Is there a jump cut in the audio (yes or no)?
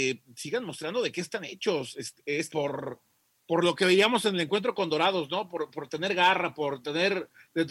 yes